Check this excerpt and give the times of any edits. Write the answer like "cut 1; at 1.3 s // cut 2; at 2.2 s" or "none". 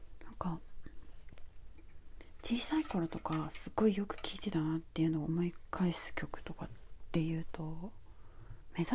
none